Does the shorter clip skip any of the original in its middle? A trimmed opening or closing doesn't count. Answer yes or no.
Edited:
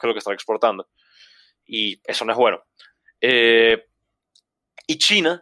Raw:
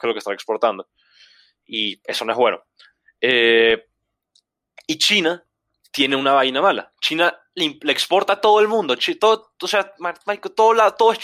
no